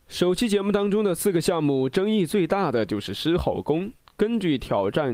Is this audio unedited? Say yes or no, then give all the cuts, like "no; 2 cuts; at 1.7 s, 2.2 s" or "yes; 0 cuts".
yes; 0 cuts